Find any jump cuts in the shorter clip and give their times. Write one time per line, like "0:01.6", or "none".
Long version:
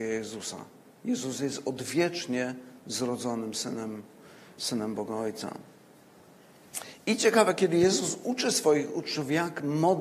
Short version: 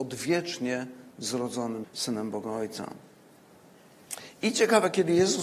0:01.8